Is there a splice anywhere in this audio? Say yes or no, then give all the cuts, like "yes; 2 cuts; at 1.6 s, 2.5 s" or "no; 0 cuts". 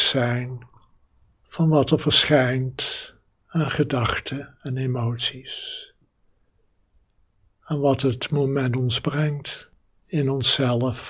no; 0 cuts